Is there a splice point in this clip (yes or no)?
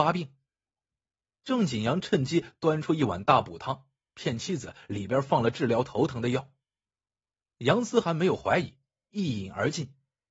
no